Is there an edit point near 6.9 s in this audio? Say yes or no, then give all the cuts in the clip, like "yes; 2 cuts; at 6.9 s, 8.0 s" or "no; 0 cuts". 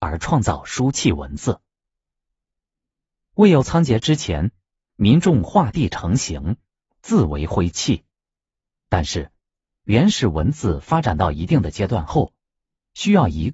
no; 1 cut; at 8.8 s